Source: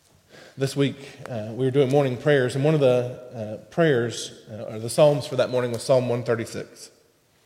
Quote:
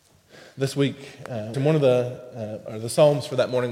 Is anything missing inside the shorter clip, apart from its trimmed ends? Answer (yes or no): yes